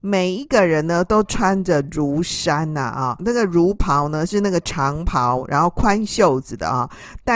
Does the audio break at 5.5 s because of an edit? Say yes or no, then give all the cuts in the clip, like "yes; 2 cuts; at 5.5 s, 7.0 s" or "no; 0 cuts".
no; 1 cut; at 3.2 s